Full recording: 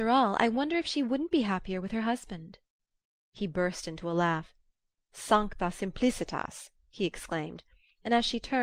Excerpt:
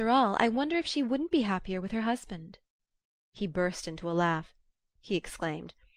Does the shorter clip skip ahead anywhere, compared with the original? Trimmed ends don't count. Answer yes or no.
yes